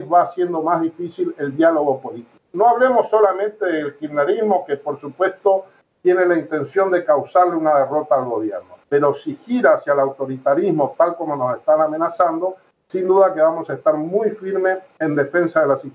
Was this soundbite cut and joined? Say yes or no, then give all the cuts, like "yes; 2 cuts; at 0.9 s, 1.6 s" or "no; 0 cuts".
yes; 2 cuts; at 2.4 s, 8.8 s